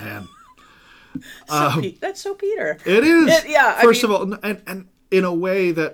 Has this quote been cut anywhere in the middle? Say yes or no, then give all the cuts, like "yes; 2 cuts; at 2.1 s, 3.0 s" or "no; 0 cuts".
no; 0 cuts